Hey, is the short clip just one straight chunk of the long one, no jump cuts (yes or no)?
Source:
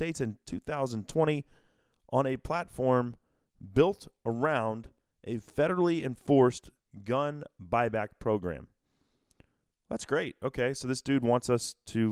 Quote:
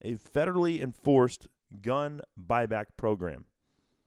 yes